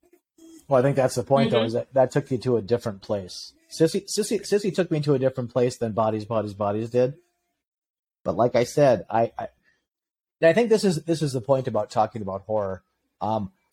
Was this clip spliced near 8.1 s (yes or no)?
no